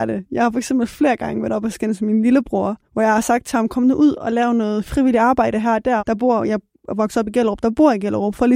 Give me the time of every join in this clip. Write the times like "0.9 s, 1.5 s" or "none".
2.8 s, 6.0 s